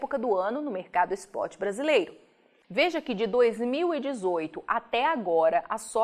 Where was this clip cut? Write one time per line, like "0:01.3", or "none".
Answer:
0:02.6